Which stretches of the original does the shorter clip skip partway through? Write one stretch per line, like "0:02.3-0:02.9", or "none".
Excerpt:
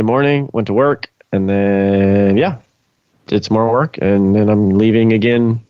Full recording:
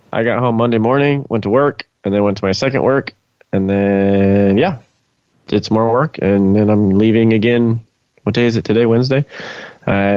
0:01.9-0:03.4